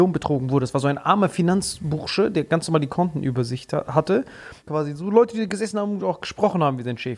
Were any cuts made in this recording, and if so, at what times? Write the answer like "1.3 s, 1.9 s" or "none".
4.6 s

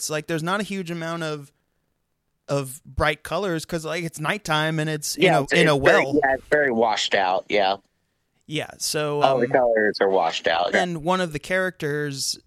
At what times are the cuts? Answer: 9.2 s, 10.7 s

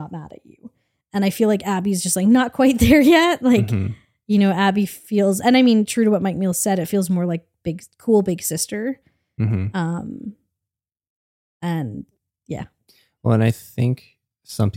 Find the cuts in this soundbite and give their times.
none

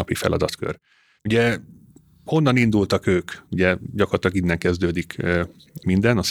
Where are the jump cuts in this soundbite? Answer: 1.2 s, 3.4 s

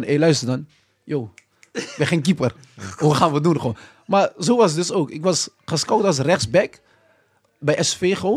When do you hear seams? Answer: none

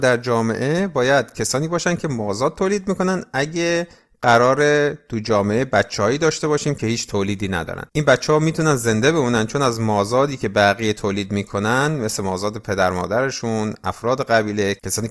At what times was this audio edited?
7.9 s

